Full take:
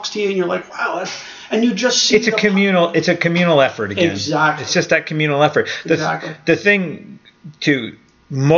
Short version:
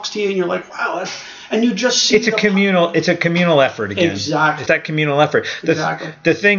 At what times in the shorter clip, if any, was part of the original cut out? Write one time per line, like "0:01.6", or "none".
0:04.7